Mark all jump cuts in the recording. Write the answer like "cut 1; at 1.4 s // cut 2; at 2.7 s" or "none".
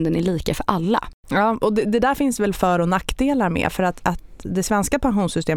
cut 1; at 4.0 s